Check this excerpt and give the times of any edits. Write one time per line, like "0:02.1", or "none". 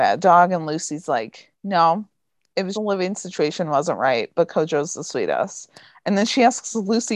0:01.5
0:02.7